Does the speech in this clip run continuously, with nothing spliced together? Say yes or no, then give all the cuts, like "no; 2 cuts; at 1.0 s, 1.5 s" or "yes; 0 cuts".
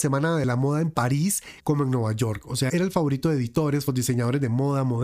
no; 3 cuts; at 1.6 s, 2.7 s, 3.9 s